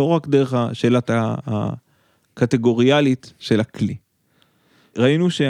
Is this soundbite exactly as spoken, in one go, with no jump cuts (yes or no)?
yes